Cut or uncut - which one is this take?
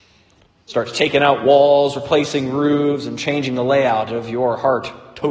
uncut